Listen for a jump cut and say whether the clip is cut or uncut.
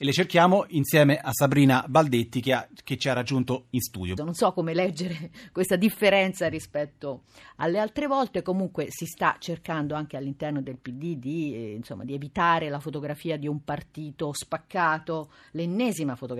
cut